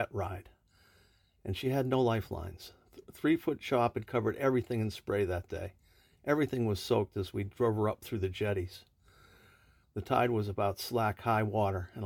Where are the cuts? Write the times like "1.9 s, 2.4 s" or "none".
9.8 s